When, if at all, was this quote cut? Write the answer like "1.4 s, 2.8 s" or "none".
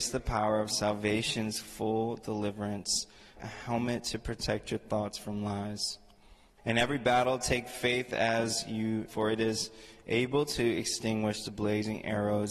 3.4 s, 6.6 s, 9.1 s